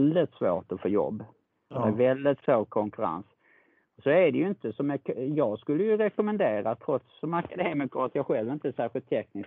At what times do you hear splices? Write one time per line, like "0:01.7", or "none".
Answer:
none